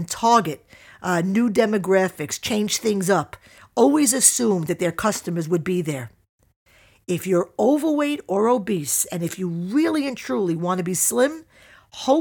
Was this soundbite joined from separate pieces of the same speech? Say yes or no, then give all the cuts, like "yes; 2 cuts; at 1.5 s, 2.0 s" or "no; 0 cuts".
no; 0 cuts